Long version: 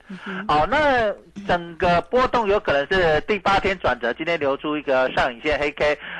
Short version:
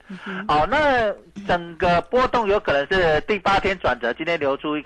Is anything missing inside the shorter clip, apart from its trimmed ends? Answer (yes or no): no